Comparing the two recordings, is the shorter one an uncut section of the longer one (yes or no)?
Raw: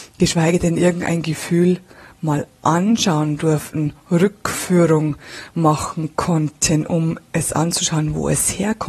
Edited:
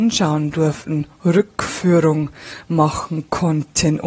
yes